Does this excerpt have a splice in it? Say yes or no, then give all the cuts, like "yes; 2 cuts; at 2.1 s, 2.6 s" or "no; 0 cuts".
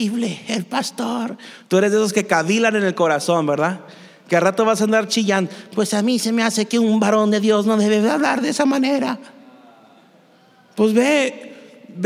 no; 0 cuts